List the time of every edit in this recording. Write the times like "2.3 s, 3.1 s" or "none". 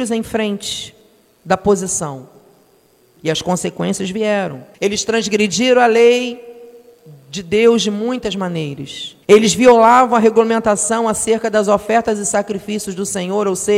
3.2 s, 4.7 s, 9.2 s

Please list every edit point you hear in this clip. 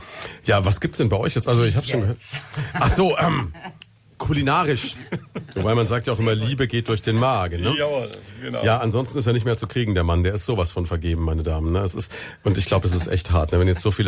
none

